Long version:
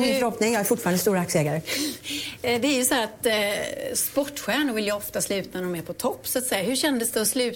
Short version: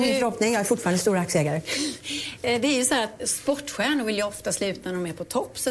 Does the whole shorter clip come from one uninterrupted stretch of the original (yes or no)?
no